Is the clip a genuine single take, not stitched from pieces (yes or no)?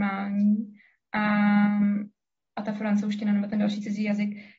yes